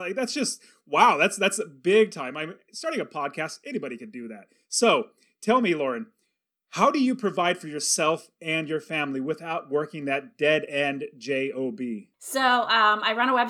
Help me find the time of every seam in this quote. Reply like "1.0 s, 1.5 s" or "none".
none